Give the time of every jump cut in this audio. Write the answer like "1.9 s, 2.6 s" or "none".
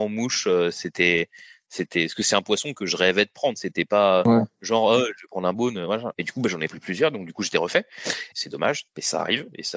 6.1 s, 8.3 s